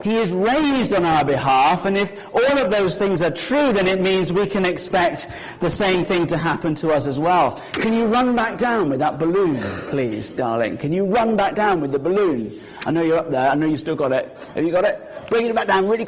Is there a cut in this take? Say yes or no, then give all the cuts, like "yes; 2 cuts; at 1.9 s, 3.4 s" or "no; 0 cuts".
no; 0 cuts